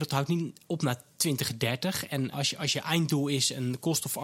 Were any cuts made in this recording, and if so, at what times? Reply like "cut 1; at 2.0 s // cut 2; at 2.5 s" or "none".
cut 1; at 2.3 s

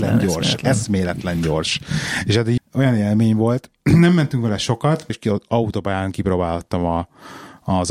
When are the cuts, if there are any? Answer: cut 1; at 2.6 s // cut 2; at 5.1 s

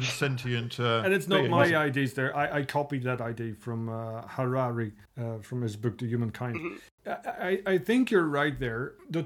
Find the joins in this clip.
none

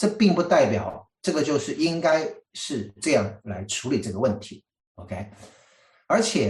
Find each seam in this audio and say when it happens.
none

